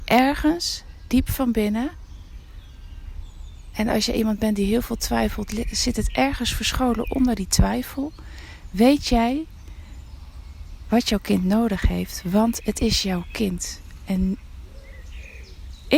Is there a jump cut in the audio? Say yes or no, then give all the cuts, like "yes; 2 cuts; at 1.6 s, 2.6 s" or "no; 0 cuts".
no; 0 cuts